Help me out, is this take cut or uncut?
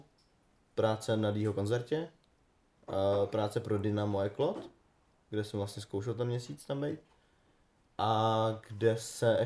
uncut